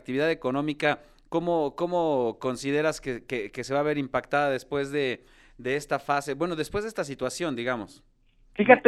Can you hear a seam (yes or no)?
no